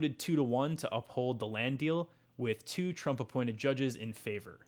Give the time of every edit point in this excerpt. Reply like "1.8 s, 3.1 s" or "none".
none